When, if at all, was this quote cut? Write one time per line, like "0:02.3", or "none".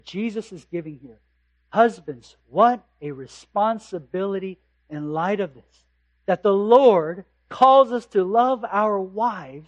none